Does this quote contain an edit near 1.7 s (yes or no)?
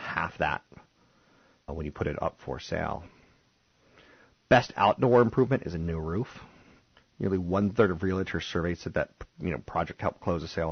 yes